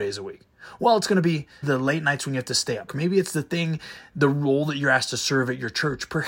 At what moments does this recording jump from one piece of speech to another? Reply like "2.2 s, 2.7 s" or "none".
1.6 s, 2.9 s